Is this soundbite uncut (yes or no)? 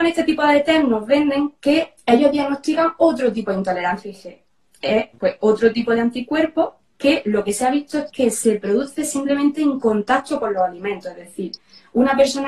no